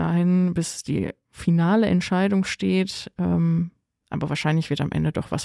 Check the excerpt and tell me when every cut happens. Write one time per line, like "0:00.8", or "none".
0:04.0